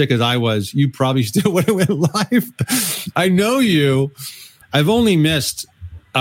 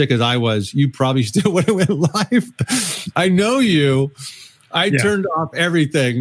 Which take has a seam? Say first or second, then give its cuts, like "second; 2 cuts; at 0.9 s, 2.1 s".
first; 1 cut; at 4.6 s